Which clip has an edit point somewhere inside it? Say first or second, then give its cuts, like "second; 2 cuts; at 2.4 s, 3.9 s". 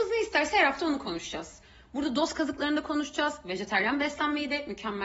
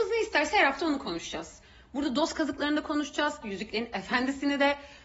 second; 1 cut; at 3.4 s